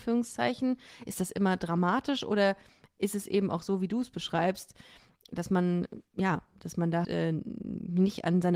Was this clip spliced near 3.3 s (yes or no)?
no